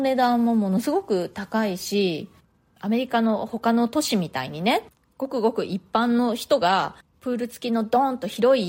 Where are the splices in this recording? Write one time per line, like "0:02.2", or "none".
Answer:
none